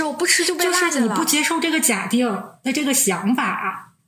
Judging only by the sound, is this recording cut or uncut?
uncut